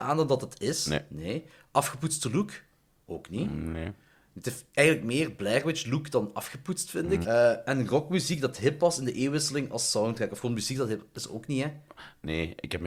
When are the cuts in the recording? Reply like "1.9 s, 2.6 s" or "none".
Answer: 7.2 s